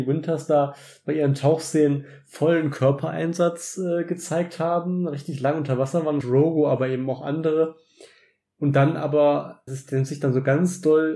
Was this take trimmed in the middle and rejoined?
yes; 2 cuts; at 6.2 s, 9.7 s

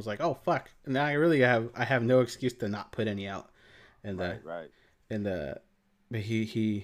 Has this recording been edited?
no; 0 cuts

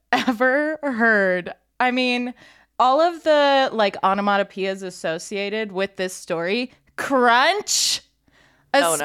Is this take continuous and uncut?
yes; 0 cuts

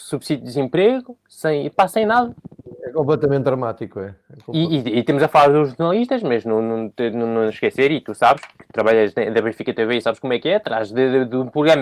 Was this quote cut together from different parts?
no; 0 cuts

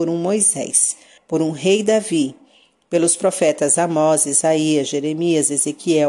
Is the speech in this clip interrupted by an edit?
yes; 1 cut; at 1.2 s

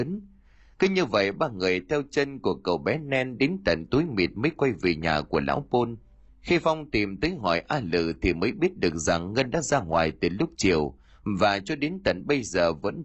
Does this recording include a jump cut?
yes; 1 cut; at 6.3 s

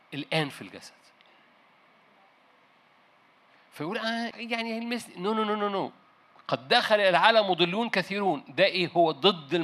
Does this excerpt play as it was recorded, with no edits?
no; 1 cut; at 4.3 s

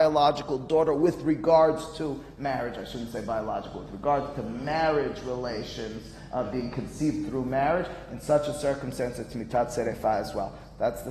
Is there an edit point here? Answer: no; 0 cuts

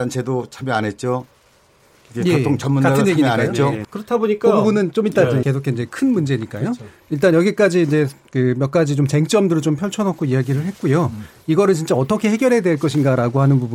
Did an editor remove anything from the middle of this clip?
yes; 2 cuts; at 3.8 s, 5.4 s

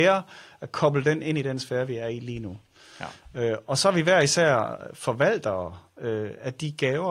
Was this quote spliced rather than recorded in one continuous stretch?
no; 0 cuts

